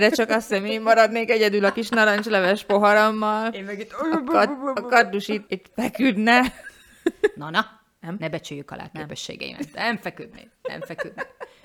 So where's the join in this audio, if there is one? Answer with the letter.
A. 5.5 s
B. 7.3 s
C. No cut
A